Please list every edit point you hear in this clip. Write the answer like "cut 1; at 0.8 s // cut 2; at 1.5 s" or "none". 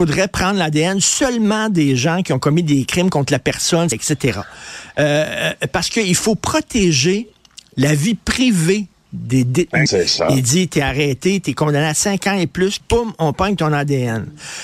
cut 1; at 3.9 s // cut 2; at 9.9 s // cut 3; at 12.8 s